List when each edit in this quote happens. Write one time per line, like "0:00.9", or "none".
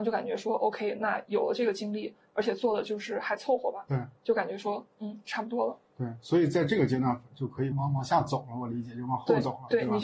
0:07.7